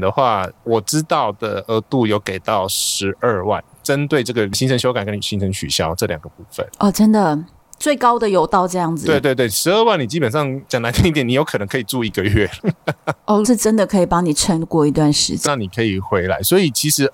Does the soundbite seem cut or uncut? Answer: cut